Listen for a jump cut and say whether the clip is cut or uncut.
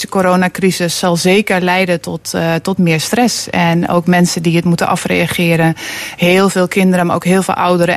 cut